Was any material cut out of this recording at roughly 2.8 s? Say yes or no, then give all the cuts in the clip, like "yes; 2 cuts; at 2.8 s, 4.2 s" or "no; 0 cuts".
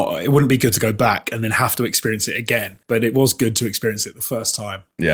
yes; 1 cut; at 2.8 s